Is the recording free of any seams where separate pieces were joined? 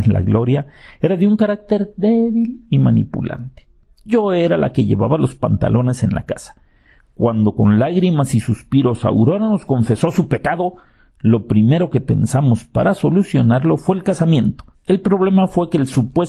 no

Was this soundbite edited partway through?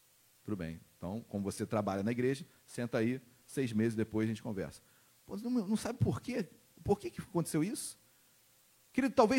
no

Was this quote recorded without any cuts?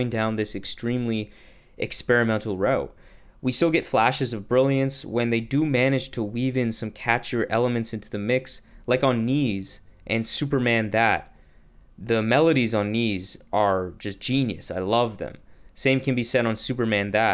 yes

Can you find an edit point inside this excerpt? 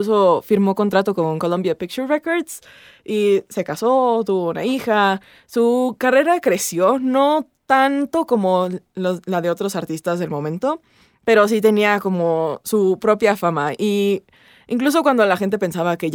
no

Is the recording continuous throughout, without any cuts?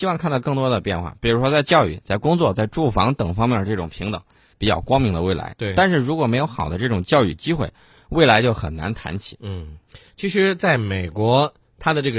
no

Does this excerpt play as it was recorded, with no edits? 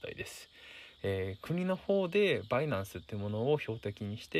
no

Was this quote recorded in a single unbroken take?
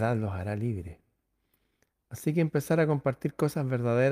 yes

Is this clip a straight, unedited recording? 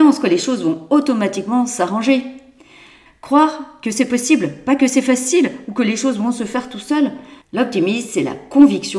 no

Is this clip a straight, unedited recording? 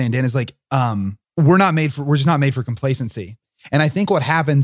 no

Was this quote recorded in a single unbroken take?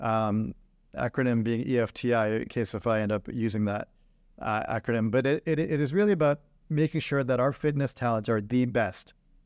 yes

